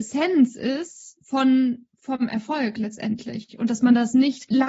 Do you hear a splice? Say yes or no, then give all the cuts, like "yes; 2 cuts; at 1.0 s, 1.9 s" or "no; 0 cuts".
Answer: no; 0 cuts